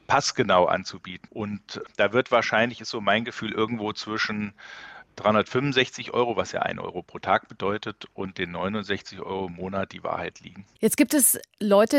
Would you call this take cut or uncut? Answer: cut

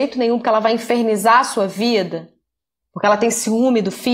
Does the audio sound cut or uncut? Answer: uncut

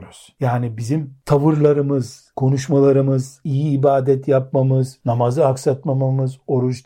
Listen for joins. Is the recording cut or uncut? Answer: cut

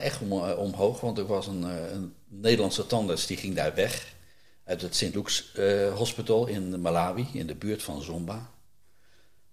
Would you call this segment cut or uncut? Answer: uncut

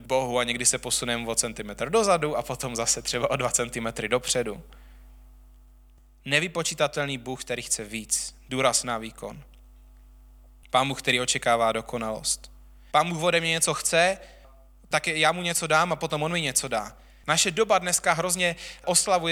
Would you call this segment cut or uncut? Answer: cut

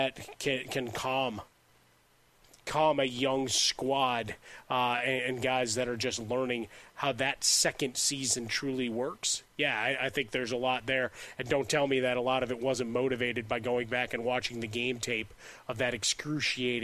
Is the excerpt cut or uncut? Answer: uncut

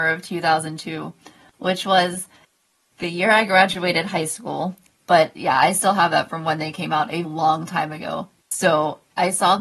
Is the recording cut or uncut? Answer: cut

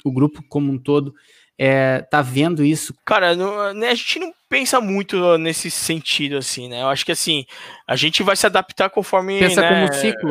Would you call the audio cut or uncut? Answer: cut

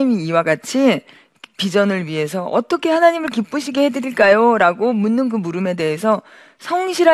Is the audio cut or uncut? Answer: uncut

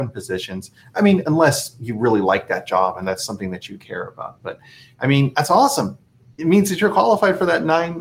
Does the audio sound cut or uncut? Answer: uncut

